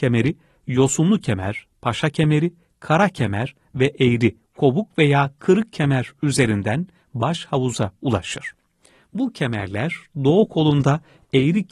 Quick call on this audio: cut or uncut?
cut